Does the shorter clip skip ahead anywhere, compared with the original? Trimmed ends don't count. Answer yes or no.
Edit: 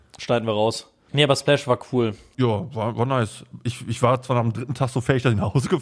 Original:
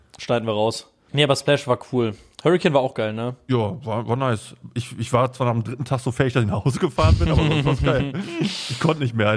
yes